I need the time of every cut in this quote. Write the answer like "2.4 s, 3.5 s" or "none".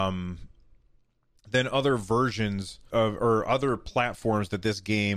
2.9 s